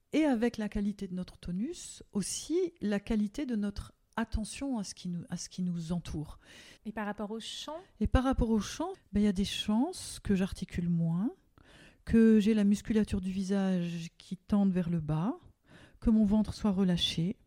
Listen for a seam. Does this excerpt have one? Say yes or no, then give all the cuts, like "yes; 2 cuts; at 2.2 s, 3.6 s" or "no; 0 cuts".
yes; 2 cuts; at 6.8 s, 8.9 s